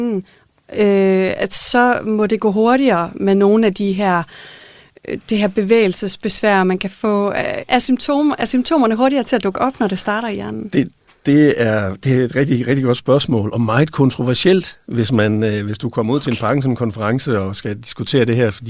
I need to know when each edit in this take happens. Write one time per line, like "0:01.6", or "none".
0:07.6